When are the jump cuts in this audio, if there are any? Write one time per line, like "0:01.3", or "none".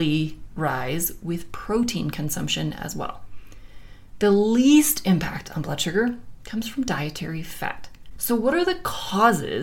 0:08.2